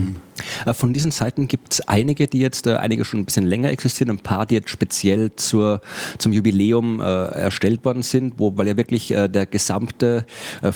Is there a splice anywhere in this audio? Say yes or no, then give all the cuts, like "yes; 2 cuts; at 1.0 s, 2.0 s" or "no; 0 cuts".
no; 0 cuts